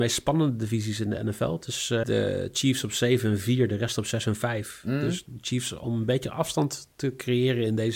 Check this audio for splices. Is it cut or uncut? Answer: cut